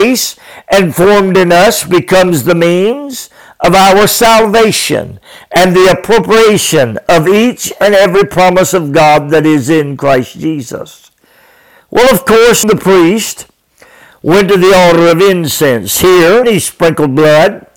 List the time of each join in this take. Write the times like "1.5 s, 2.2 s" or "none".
12.6 s, 16.4 s